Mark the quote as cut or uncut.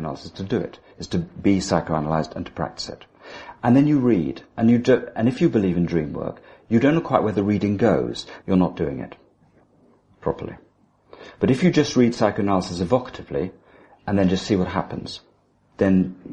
cut